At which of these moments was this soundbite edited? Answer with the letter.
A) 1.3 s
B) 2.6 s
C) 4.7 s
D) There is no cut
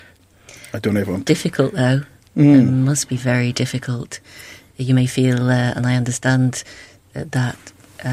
A